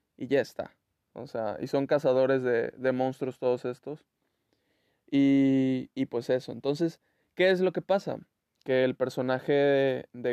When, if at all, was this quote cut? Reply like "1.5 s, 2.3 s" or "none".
none

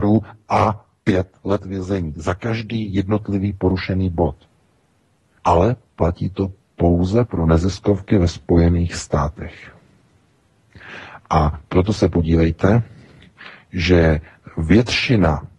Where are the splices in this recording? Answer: 5.4 s

